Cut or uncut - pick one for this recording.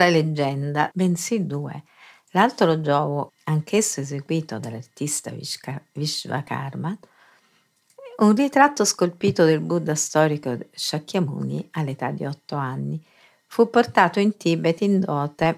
cut